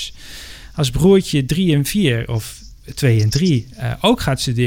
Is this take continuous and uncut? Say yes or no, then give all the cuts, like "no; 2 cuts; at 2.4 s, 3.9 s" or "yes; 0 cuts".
yes; 0 cuts